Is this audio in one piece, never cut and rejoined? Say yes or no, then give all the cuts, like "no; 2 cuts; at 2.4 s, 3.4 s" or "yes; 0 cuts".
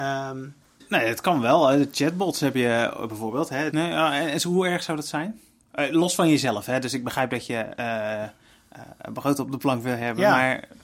no; 1 cut; at 3.7 s